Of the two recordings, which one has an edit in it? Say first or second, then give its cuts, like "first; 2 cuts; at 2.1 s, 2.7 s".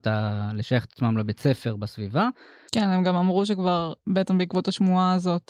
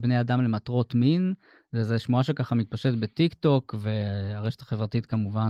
first; 1 cut; at 2.7 s